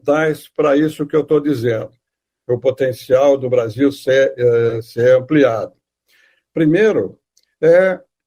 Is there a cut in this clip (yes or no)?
no